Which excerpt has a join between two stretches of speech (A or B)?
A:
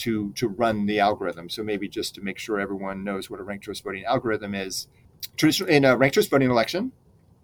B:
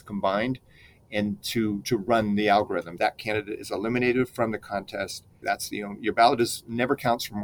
B